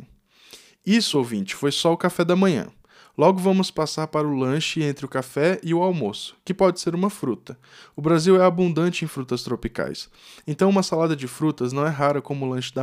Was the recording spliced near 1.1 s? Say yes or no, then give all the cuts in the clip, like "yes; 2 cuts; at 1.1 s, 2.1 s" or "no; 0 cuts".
no; 0 cuts